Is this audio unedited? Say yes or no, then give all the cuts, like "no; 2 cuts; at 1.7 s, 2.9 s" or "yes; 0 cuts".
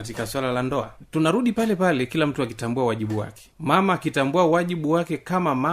yes; 0 cuts